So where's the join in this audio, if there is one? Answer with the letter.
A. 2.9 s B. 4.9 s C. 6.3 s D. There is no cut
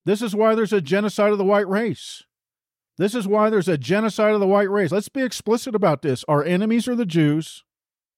D